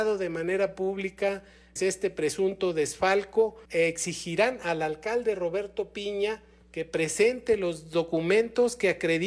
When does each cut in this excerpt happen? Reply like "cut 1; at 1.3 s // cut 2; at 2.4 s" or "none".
cut 1; at 1.8 s // cut 2; at 3.6 s